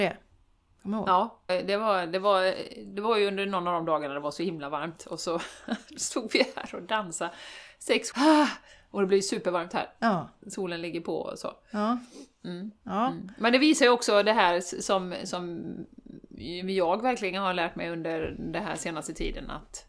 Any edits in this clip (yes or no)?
yes